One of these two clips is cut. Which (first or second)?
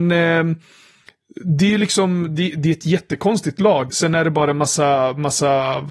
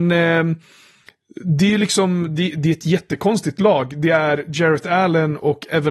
first